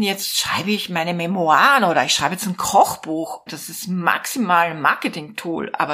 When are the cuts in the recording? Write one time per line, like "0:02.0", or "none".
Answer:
0:03.5